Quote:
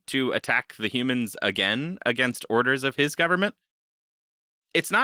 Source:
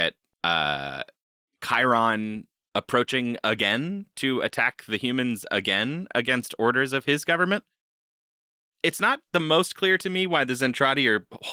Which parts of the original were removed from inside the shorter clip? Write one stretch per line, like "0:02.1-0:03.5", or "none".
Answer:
none